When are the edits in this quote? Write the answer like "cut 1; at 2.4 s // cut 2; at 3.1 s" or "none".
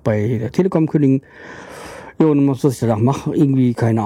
none